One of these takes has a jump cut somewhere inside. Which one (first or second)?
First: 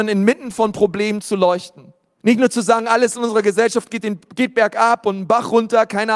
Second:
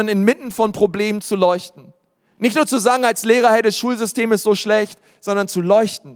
first